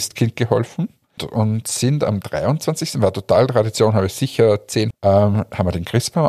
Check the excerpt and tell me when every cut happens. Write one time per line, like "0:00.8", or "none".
0:01.2
0:04.9